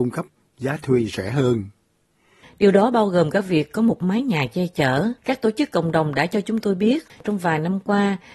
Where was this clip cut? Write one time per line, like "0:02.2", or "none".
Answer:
0:02.4
0:05.2

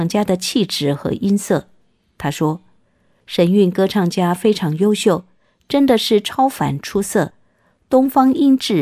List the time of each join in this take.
none

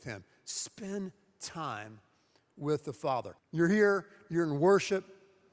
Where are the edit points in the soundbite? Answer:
0:03.4

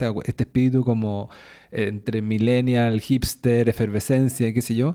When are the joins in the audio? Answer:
none

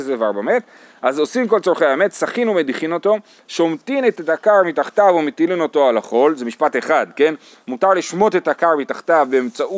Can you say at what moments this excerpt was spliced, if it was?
0:03.4

